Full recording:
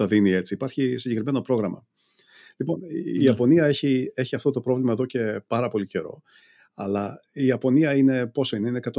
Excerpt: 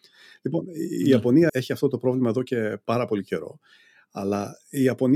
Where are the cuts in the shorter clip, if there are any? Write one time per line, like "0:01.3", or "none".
0:01.5